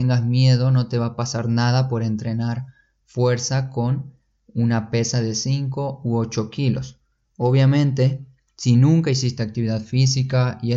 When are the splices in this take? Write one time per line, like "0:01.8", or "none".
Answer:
none